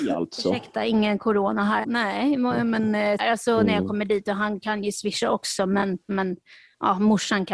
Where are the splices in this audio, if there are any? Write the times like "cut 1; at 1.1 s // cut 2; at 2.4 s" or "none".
cut 1; at 1.8 s // cut 2; at 3.2 s // cut 3; at 6.1 s

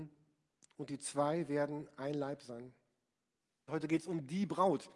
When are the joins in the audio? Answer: cut 1; at 3.7 s

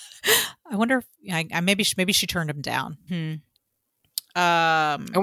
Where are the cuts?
cut 1; at 3.1 s

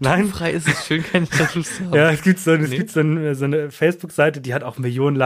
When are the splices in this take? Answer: none

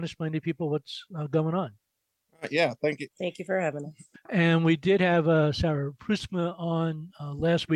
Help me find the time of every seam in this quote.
cut 1; at 3.1 s // cut 2; at 4.1 s

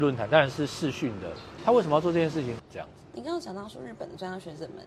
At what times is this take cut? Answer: cut 1; at 1.6 s // cut 2; at 2.6 s

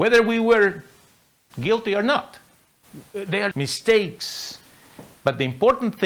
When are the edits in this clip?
cut 1; at 3.5 s

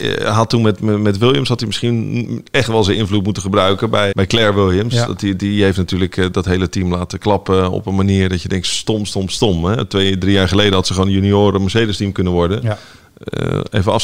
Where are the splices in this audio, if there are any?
cut 1; at 4.1 s

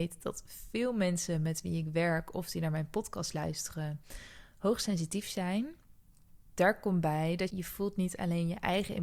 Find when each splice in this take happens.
cut 1; at 6.5 s // cut 2; at 7.5 s

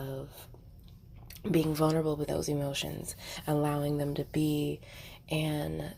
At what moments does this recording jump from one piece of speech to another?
cut 1; at 2.3 s

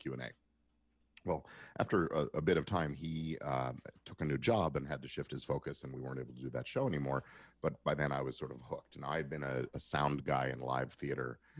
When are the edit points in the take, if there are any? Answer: none

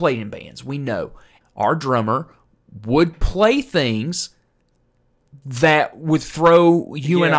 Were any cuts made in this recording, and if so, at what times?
cut 1; at 1.4 s

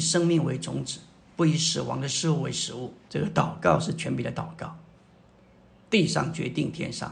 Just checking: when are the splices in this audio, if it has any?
cut 1; at 3.1 s

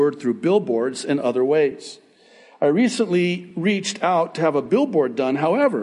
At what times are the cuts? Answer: none

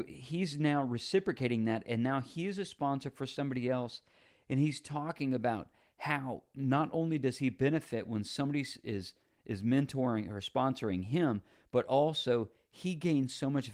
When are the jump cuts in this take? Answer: none

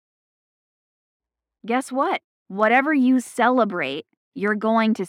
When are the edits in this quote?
cut 1; at 2.3 s

